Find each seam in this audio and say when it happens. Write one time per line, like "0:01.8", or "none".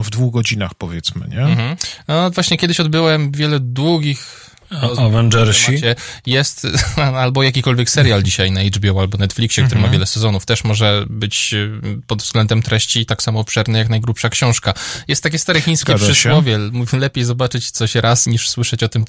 none

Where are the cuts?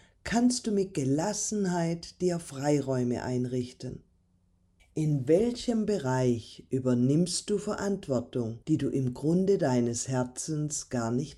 0:04.8
0:08.6

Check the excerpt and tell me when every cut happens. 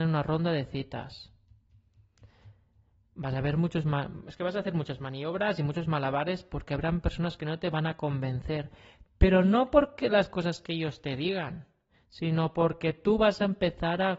none

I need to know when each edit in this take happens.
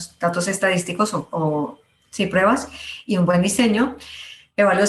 none

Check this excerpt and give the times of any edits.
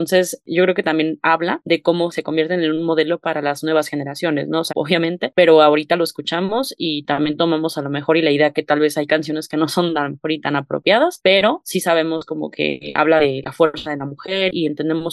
0:04.7

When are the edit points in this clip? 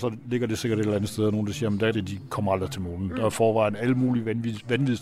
0:01.9

